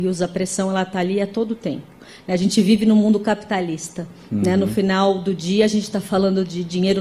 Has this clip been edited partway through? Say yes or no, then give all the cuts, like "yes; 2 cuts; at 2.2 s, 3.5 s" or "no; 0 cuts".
no; 0 cuts